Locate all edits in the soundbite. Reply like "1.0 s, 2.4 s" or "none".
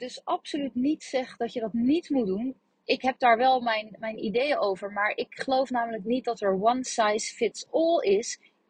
none